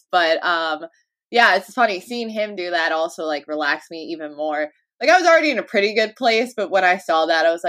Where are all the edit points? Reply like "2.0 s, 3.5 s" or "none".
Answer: none